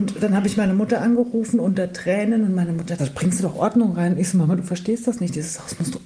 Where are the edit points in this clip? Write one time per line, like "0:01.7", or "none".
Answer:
0:03.0